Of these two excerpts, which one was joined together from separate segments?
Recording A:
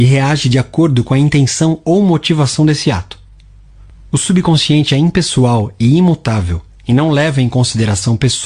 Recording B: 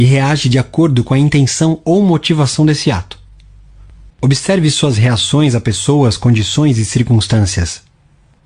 B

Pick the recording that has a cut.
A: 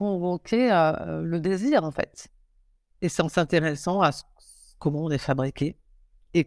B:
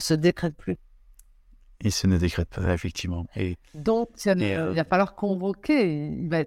A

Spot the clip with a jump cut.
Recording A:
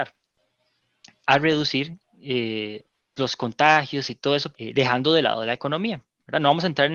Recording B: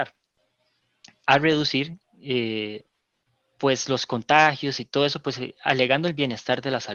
A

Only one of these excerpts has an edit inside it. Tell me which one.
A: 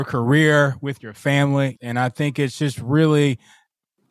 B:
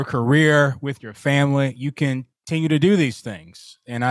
A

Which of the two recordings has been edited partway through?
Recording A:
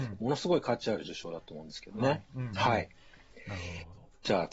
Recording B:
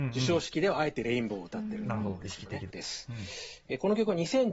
B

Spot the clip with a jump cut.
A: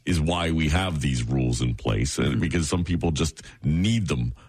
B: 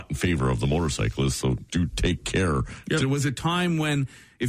B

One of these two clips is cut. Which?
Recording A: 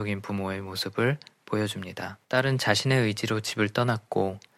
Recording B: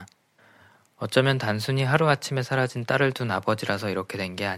A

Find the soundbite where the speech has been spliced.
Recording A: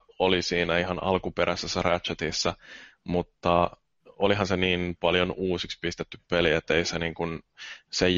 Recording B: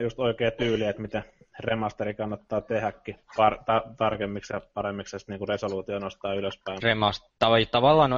B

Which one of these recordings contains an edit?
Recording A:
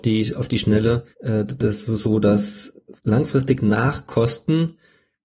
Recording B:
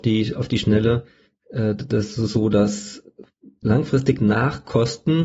A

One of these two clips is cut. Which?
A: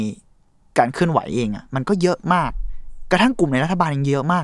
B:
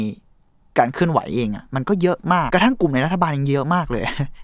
B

